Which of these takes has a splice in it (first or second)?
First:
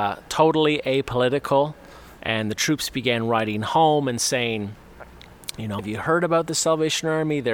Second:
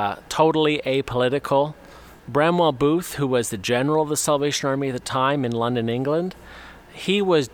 first